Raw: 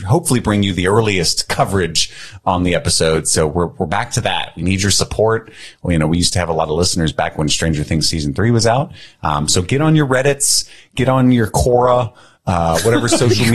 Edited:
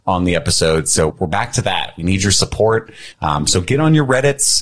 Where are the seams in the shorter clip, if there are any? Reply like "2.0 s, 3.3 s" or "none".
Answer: 1.1 s, 3.1 s